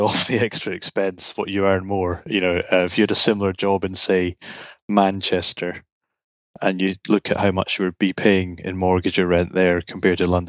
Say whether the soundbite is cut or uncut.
uncut